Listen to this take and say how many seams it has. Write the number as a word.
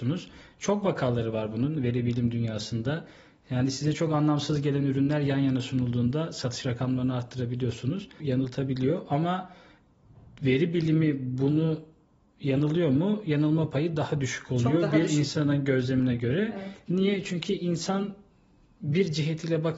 one